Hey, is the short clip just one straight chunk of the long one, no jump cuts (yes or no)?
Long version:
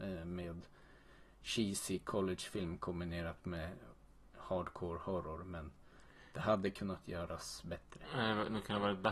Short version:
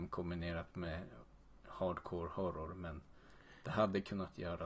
yes